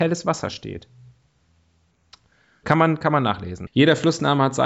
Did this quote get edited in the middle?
yes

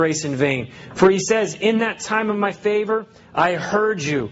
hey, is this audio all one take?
yes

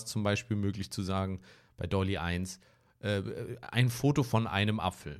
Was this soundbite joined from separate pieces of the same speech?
no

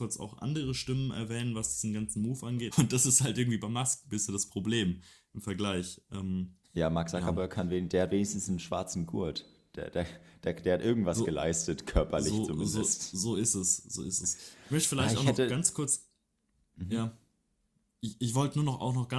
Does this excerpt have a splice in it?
yes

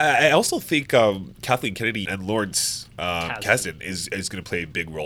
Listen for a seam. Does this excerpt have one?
yes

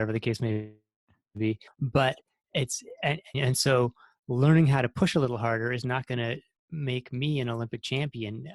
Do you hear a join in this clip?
yes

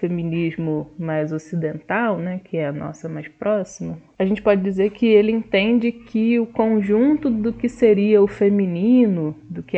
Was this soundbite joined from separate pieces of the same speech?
no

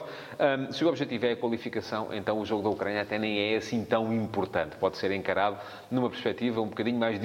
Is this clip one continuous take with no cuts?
yes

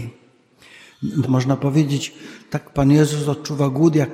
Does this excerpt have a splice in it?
yes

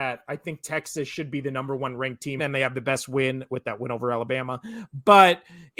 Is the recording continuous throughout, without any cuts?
no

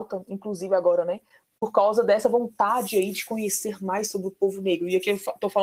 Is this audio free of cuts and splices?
yes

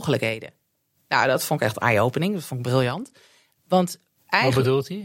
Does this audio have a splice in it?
no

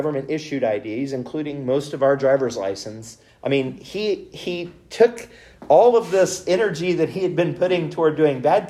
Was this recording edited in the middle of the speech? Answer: yes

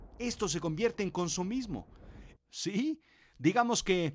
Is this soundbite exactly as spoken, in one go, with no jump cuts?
no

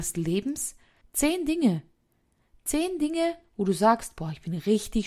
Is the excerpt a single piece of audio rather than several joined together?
no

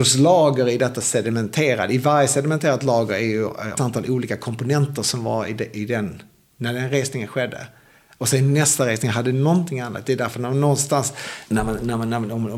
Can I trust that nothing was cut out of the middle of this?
no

